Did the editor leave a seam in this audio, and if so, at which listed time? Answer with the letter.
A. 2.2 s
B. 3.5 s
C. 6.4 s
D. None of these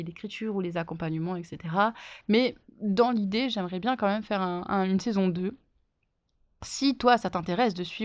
A